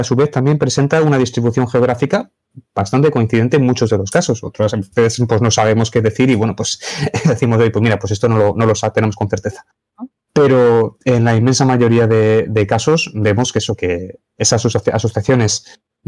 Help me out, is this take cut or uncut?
uncut